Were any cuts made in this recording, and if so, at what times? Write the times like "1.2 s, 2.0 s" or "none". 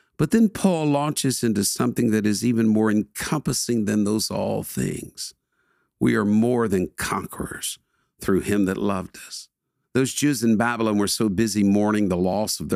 9.8 s